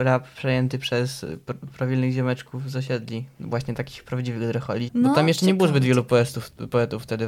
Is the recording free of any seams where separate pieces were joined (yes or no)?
no